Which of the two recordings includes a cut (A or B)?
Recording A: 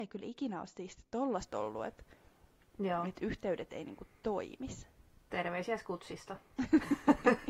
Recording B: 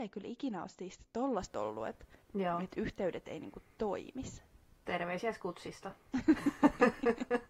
B